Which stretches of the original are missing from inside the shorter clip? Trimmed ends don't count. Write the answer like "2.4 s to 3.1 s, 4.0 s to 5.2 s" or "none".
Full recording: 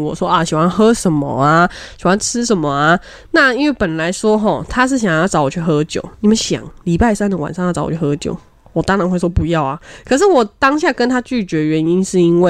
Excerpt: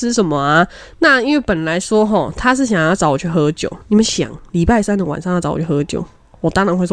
none